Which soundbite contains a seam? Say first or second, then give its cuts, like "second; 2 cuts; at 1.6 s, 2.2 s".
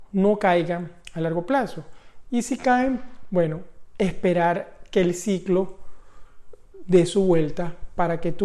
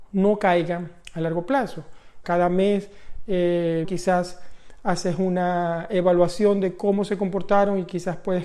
second; 2 cuts; at 2.2 s, 3.8 s